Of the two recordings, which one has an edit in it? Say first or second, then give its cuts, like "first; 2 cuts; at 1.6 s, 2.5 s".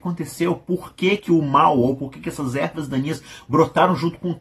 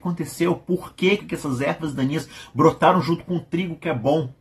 second; 1 cut; at 1.2 s